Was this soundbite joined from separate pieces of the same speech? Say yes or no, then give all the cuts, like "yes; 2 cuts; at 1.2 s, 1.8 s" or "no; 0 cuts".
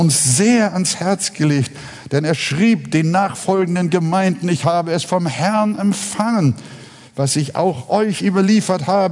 no; 0 cuts